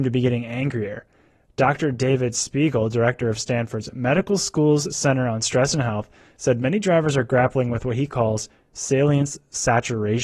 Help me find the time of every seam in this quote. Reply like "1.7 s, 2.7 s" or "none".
none